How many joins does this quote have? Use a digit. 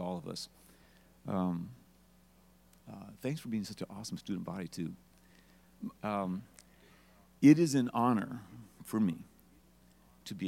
1